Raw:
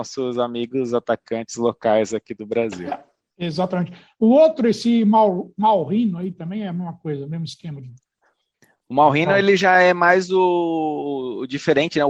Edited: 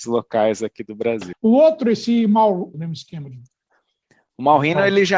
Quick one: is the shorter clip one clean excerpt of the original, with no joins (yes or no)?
no